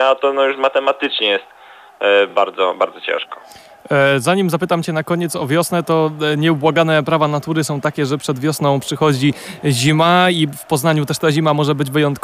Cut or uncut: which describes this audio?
uncut